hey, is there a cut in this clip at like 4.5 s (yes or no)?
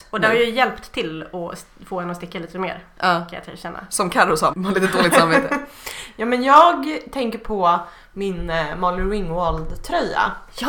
yes